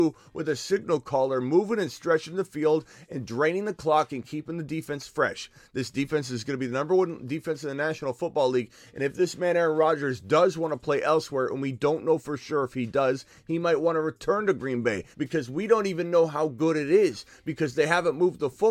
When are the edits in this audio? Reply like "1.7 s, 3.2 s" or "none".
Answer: 15.1 s